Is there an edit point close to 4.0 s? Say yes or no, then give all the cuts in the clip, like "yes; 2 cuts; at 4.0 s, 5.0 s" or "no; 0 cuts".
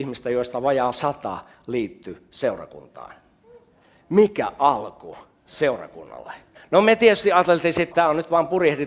no; 2 cuts; at 6.5 s, 7.9 s